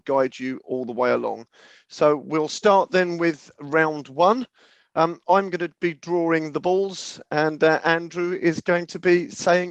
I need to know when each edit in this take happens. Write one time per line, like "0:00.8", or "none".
none